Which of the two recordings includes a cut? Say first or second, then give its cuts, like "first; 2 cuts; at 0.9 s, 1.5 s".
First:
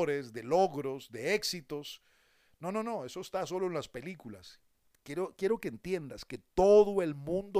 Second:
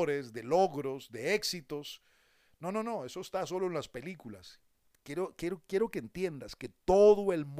first; 1 cut; at 5.4 s